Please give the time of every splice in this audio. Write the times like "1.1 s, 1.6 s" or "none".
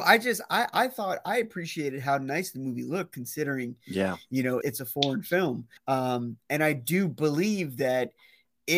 4.6 s, 5.8 s